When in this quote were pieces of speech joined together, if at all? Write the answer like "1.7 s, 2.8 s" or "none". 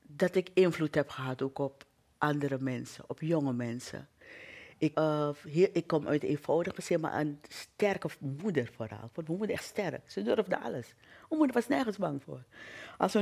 4.9 s